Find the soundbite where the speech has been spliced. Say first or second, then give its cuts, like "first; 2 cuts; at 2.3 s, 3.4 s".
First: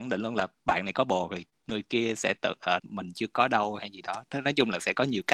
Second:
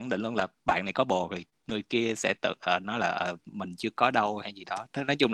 first; 1 cut; at 2.8 s